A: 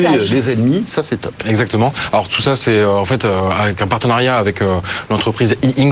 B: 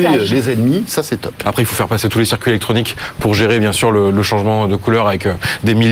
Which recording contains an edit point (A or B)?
B